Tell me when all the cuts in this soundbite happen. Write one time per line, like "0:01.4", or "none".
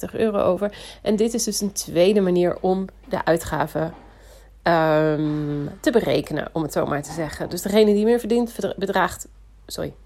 none